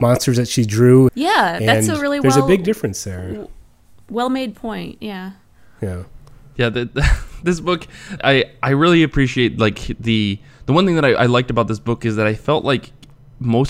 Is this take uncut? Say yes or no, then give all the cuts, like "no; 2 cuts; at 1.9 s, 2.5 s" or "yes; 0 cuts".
no; 2 cuts; at 1.1 s, 8.2 s